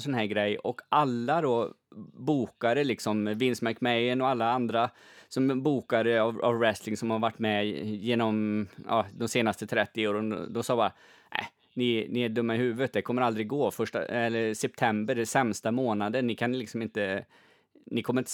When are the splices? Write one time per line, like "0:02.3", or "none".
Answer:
none